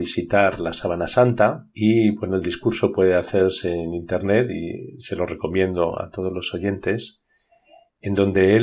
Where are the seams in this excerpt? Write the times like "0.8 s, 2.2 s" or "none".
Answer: 1.7 s